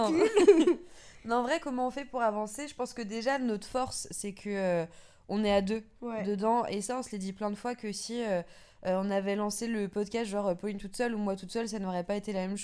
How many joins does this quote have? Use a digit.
0